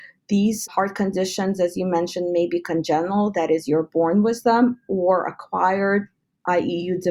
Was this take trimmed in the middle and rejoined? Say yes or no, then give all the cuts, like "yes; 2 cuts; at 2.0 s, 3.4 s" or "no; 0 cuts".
no; 0 cuts